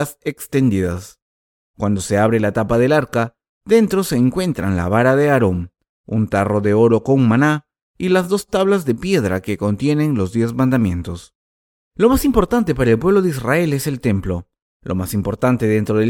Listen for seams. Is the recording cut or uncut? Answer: cut